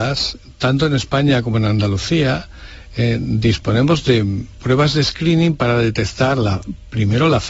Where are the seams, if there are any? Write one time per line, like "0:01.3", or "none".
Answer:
none